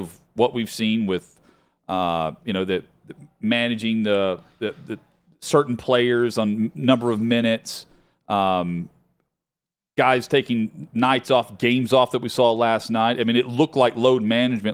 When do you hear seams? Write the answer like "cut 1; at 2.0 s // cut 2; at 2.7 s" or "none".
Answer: none

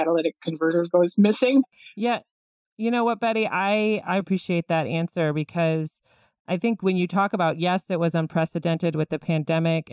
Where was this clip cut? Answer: cut 1; at 4.2 s

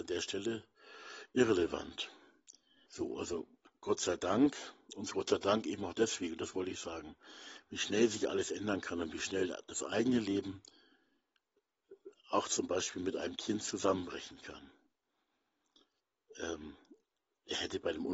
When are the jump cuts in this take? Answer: cut 1; at 2.9 s

